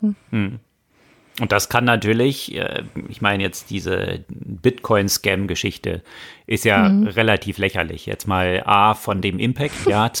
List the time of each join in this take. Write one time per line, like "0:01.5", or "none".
none

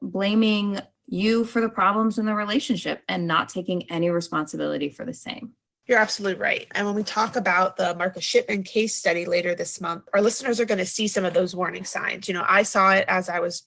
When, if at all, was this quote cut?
none

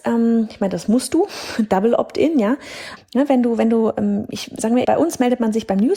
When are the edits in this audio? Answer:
0:03.0
0:04.8

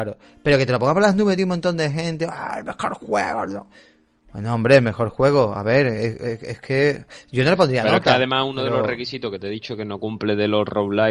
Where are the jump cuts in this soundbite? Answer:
none

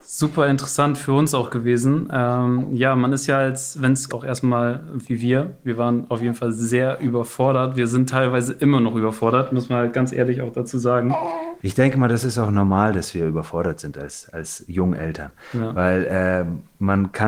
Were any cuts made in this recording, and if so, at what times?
0:04.1

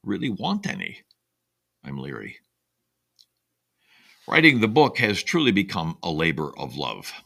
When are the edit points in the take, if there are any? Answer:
none

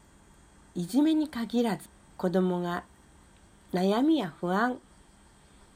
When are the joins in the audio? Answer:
none

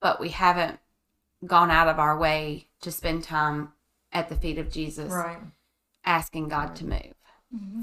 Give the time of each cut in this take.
none

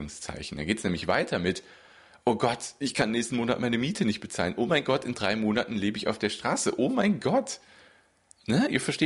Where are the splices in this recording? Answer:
none

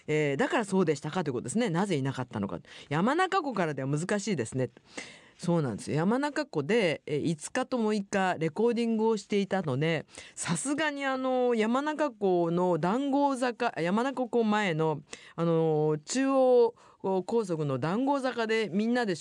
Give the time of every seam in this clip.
none

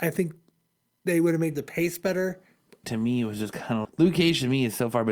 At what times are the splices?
0:02.8
0:03.8

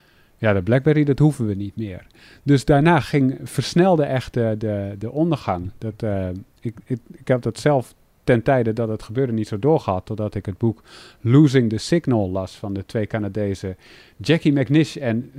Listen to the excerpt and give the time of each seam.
none

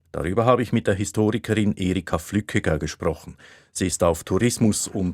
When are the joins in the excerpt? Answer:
none

